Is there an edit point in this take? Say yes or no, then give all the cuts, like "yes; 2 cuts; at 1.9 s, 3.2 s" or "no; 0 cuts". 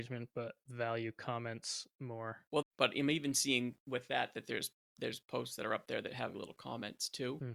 yes; 2 cuts; at 2.6 s, 6.3 s